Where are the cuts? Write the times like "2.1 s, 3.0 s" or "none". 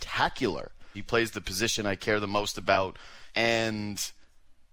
0.9 s, 3.3 s